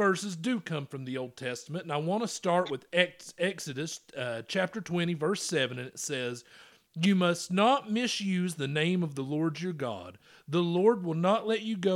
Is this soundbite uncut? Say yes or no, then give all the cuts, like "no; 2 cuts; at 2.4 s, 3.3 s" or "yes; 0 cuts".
yes; 0 cuts